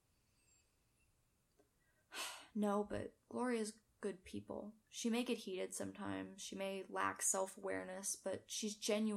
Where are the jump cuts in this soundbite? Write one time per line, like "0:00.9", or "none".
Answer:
none

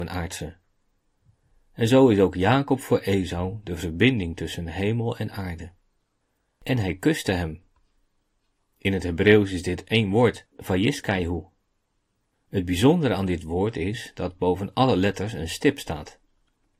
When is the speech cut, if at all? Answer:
none

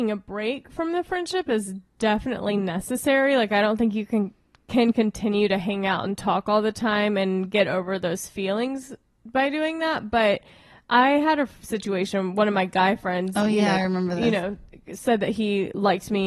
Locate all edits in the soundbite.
none

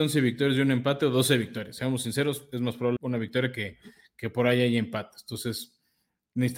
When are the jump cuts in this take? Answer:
0:03.0

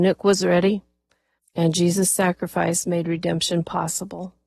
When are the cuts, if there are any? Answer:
0:01.4

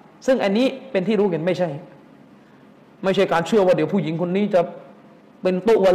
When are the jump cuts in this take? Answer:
none

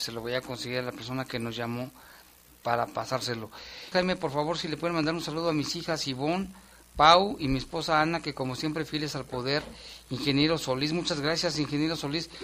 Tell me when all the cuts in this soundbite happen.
0:03.9

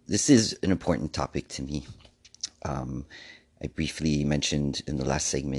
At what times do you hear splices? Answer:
none

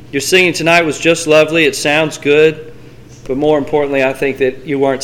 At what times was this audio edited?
none

